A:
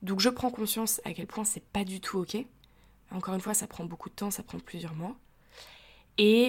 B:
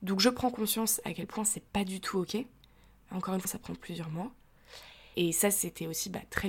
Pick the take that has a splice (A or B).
B